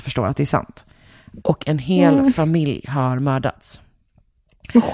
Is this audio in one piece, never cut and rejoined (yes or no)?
no